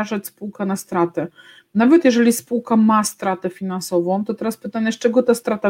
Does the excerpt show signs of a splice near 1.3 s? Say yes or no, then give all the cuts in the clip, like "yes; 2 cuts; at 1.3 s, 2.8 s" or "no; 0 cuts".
no; 0 cuts